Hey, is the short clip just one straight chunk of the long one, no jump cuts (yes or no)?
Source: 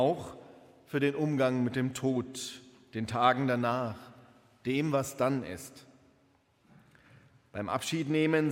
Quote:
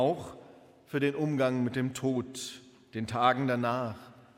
yes